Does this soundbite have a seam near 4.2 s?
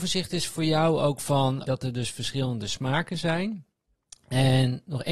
no; 1 cut; at 1.6 s

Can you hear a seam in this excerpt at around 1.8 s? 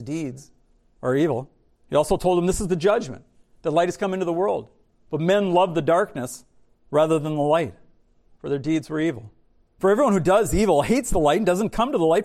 yes; 1 cut; at 1.8 s

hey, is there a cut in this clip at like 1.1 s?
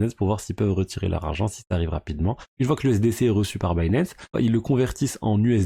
no; 2 cuts; at 2.5 s, 4.3 s

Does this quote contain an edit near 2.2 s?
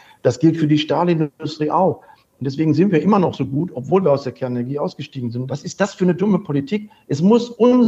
no; 1 cut; at 5.5 s

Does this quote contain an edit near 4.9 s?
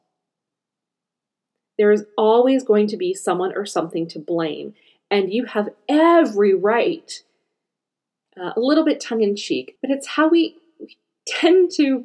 no; 2 cuts; at 8.3 s, 9.8 s

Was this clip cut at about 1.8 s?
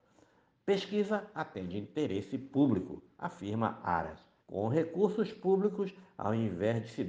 no; 1 cut; at 4.4 s

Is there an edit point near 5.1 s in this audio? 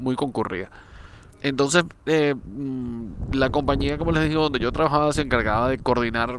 no; 1 cut; at 1.3 s

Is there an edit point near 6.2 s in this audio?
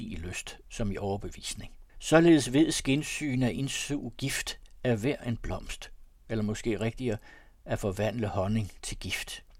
no; 1 cut; at 1.9 s

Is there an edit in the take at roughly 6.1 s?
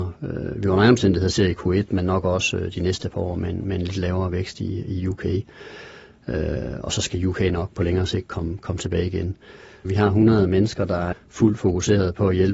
no; 2 cuts; at 9.8 s, 11.1 s

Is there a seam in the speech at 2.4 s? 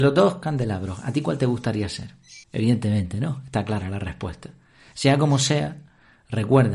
yes; 1 cut; at 2.4 s

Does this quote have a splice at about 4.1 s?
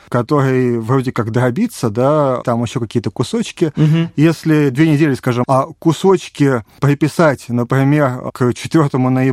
no; 2 cuts; at 2.4 s, 5.4 s

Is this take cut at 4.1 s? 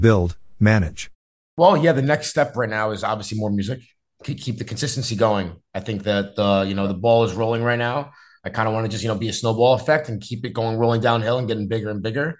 no; 0 cuts

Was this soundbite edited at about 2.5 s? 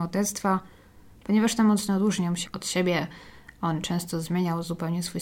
yes; 1 cut; at 2.5 s

